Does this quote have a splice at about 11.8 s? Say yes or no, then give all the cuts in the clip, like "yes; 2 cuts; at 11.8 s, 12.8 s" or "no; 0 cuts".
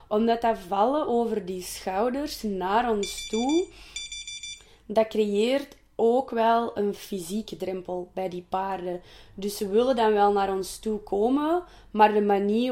no; 0 cuts